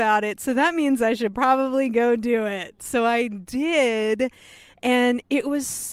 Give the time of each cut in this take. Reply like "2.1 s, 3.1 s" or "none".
none